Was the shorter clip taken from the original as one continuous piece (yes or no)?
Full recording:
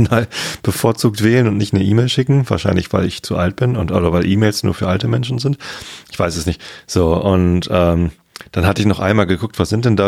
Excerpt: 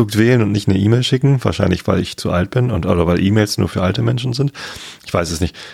yes